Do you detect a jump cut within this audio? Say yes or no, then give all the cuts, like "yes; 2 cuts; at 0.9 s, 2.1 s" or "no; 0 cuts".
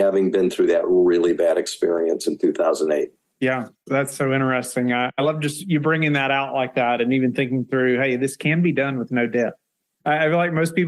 no; 0 cuts